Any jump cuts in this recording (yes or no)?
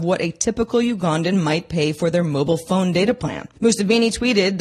yes